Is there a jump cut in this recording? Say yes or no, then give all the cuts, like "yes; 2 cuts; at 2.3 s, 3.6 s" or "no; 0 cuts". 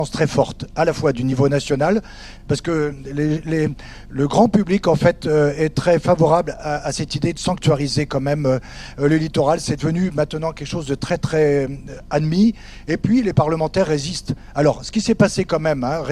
no; 0 cuts